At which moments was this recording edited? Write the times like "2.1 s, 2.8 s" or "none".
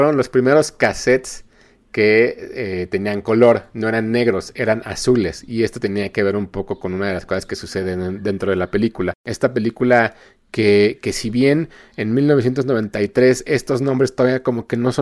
9.2 s